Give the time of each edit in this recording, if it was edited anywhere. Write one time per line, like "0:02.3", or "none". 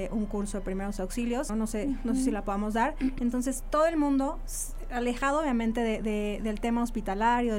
0:01.5
0:03.2